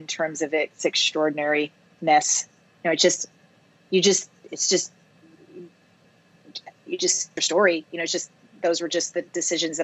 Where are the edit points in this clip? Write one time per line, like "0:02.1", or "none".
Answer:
0:07.4